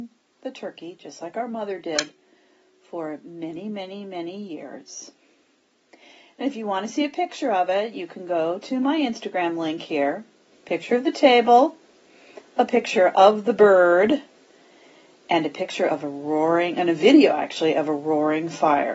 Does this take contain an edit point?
yes; 1 cut; at 10.5 s

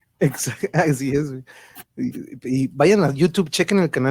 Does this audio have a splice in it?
no; 0 cuts

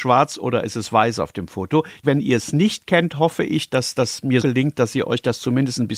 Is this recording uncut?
no; 2 cuts; at 2.0 s, 4.4 s

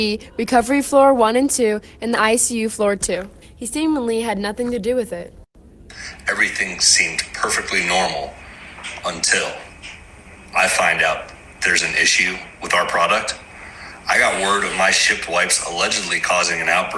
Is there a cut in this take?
yes; 1 cut; at 3.4 s

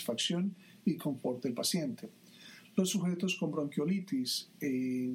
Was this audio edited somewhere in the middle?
no; 0 cuts

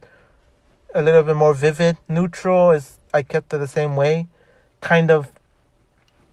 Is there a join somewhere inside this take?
yes; 1 cut; at 2.0 s

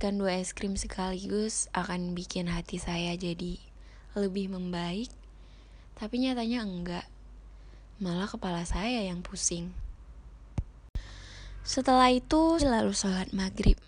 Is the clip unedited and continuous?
no; 1 cut; at 12.6 s

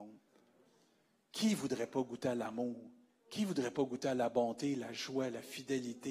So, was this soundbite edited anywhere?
no; 0 cuts

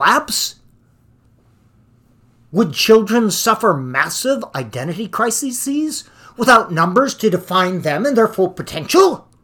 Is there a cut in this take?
no; 0 cuts

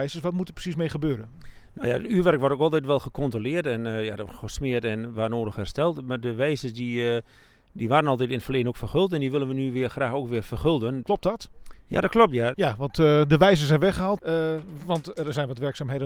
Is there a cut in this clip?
yes; 3 cuts; at 11.0 s, 12.5 s, 14.2 s

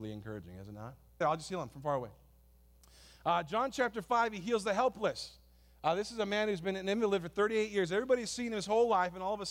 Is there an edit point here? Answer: yes; 1 cut; at 1.2 s

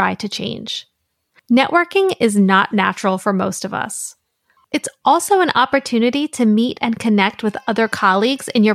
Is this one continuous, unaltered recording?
no; 1 cut; at 4.6 s

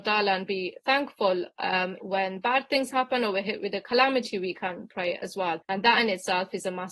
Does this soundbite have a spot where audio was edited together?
yes; 2 cuts; at 2.0 s, 5.6 s

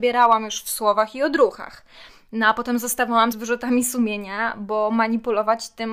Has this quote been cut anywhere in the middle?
yes; 1 cut; at 3.3 s

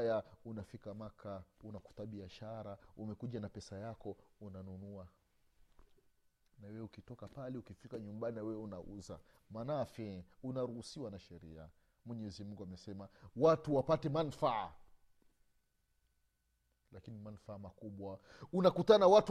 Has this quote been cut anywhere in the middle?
no; 0 cuts

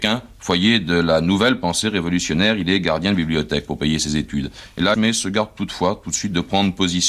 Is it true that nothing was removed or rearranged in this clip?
no; 1 cut; at 4.9 s

